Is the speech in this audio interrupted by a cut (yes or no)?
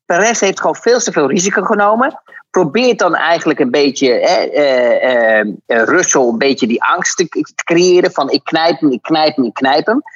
no